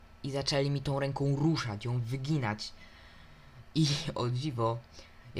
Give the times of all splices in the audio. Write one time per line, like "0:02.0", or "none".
none